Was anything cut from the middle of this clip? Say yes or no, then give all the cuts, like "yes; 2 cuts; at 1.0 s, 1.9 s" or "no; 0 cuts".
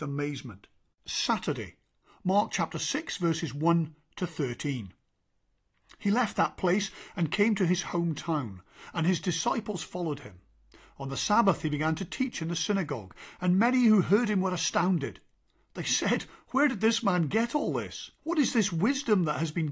yes; 2 cuts; at 0.9 s, 18.2 s